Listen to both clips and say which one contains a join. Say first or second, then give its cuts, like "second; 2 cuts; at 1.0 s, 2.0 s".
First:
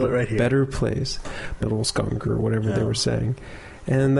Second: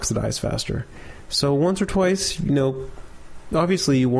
first; 1 cut; at 1.6 s